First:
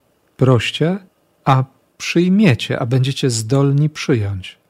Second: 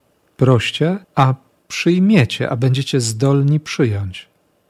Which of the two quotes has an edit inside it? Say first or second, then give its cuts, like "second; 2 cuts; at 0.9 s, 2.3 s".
second; 1 cut; at 1.0 s